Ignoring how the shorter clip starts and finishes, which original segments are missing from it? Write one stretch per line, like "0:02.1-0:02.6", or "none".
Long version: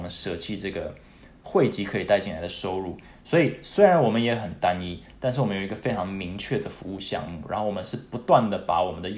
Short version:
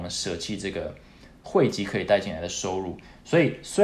none